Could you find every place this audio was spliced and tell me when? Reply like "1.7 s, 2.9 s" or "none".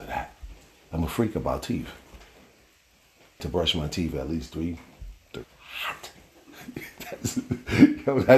3.4 s, 5.4 s